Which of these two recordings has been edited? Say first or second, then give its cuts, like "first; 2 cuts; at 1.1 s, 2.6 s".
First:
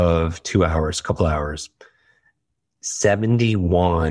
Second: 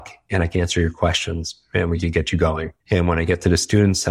second; 1 cut; at 2.8 s